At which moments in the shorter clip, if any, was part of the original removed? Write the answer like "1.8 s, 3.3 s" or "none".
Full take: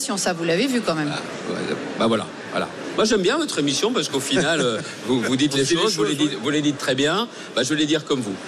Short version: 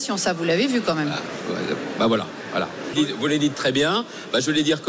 2.9 s